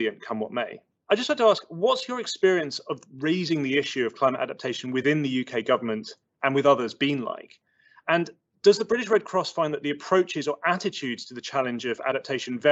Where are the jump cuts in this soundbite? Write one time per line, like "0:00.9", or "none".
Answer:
0:01.0